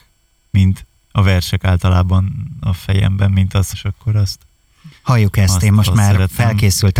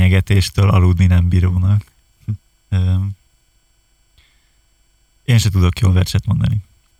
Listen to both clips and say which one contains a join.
first; 2 cuts; at 3.7 s, 5.0 s

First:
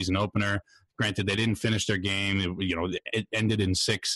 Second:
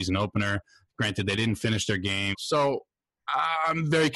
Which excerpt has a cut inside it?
second; 1 cut; at 2.3 s

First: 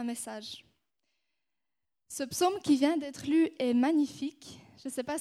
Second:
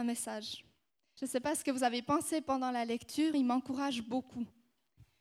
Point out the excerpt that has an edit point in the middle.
second; 2 cuts; at 1.2 s, 3.3 s

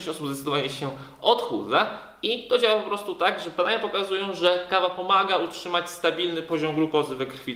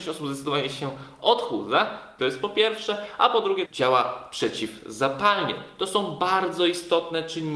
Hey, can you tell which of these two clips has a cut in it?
second; 2 cuts; at 2.2 s, 3.6 s

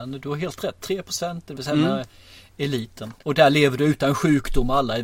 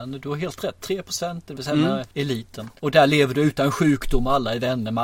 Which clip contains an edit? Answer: second; 1 cut; at 2.1 s

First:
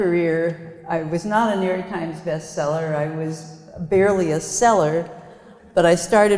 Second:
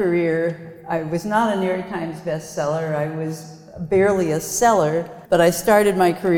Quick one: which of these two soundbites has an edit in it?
second; 1 cut; at 5.3 s

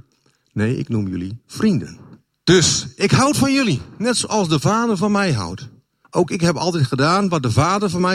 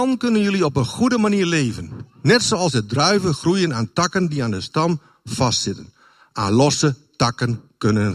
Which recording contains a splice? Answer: first; 2 cuts; at 2.3 s, 6.0 s

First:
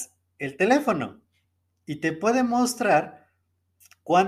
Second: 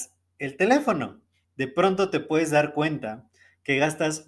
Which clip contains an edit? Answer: second; 1 cut; at 1.4 s

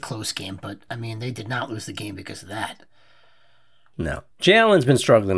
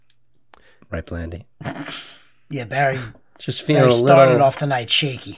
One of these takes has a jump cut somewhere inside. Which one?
first; 1 cut; at 4.3 s

